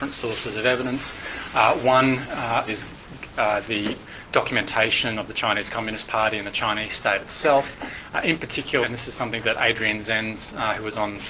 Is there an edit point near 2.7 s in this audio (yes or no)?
yes